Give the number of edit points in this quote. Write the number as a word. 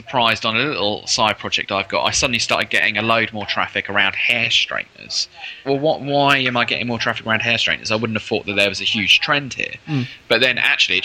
one